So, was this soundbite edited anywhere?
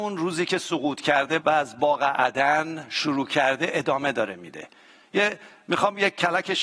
yes; 1 cut; at 1.4 s

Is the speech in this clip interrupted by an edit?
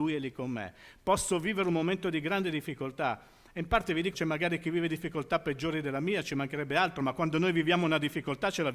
yes; 1 cut; at 4.1 s

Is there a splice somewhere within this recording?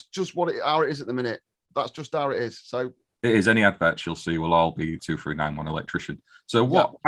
yes; 1 cut; at 5.0 s

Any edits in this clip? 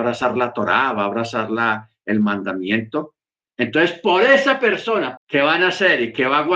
yes; 1 cut; at 5.2 s

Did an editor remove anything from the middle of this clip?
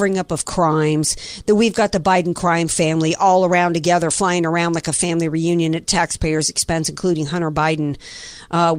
no; 0 cuts

